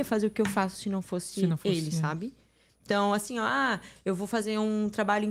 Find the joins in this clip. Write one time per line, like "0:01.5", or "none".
none